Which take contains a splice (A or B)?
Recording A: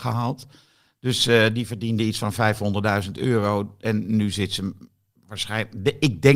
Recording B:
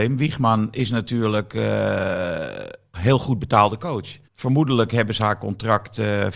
B